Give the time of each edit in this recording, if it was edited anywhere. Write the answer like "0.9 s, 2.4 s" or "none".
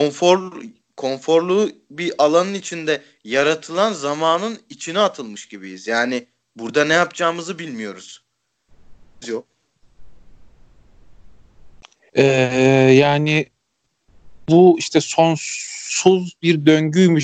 9.2 s, 12.1 s